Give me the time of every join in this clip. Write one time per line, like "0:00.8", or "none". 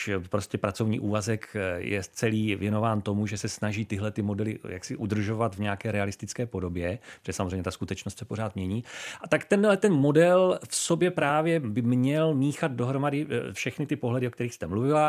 none